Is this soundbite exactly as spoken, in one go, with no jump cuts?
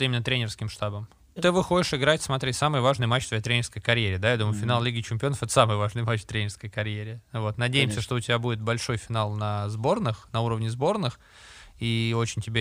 no; 1 cut; at 1.4 s

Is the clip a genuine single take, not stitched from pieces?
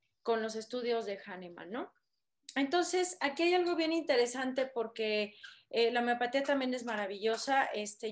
yes; 0 cuts

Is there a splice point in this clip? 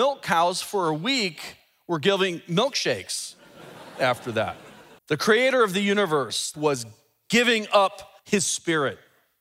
yes; 3 cuts; at 5.0 s, 6.5 s, 8.2 s

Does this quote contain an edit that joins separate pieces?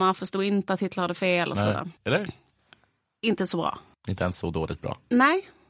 yes; 2 cuts; at 2.0 s, 3.9 s

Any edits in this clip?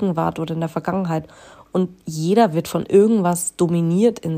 no; 0 cuts

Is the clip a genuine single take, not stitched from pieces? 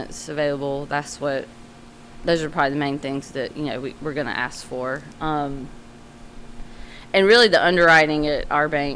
yes; 0 cuts

